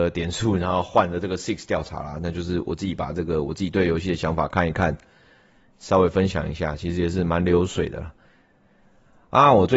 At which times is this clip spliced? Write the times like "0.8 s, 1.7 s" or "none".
none